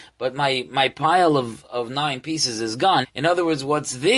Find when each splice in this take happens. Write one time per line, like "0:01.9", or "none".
0:03.0